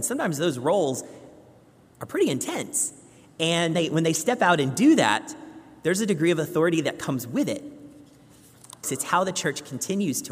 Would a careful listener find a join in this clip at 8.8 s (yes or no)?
yes